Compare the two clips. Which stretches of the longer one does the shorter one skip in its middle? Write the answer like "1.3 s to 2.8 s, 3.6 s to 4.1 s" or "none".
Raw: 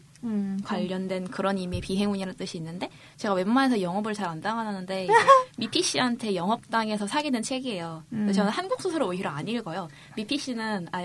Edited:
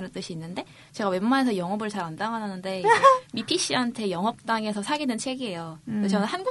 none